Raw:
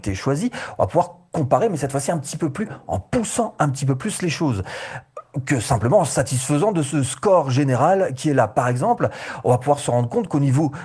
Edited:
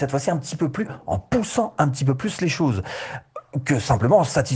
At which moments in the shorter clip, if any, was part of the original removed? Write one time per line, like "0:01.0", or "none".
none